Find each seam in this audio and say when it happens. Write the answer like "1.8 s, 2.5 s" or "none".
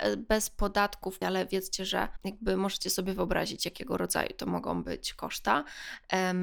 1.2 s

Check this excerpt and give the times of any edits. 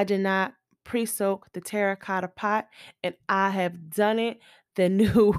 none

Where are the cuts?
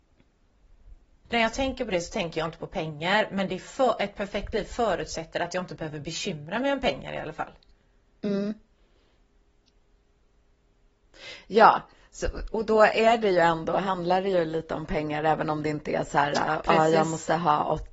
1.2 s

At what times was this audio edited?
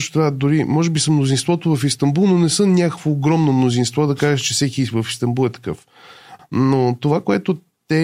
6.4 s

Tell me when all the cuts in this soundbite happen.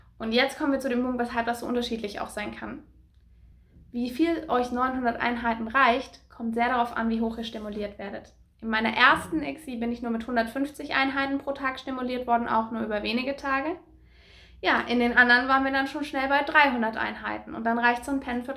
none

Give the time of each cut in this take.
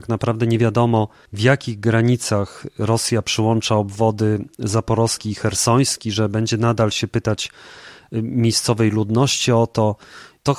none

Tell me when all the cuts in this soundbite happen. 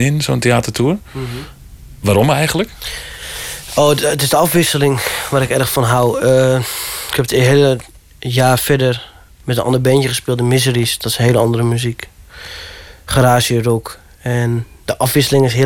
none

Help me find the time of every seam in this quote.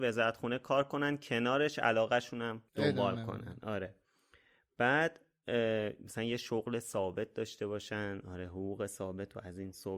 2.7 s

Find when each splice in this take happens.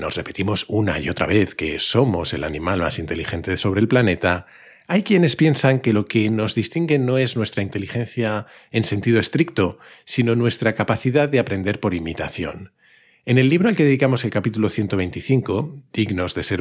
none

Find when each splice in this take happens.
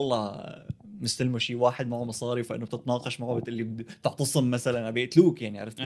none

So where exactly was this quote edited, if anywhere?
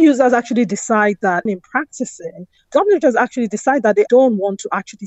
1.5 s, 2.7 s, 4.1 s

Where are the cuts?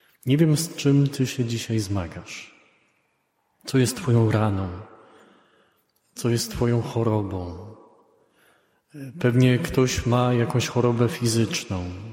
none

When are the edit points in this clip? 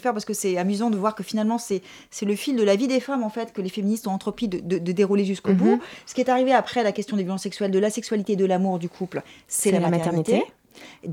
none

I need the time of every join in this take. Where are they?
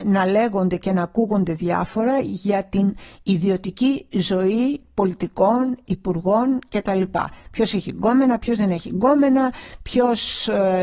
none

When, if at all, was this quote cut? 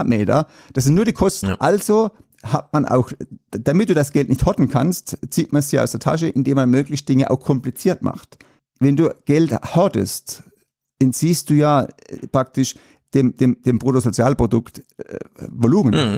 1.4 s, 8.6 s

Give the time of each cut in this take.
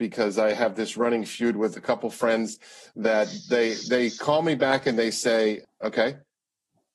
5.6 s

